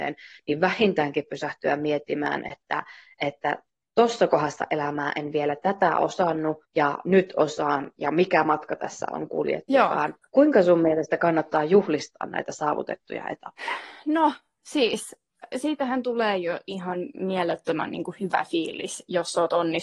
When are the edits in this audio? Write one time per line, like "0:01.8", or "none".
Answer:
0:06.6
0:10.2